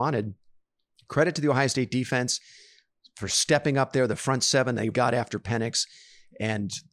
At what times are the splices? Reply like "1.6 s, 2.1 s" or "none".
4.9 s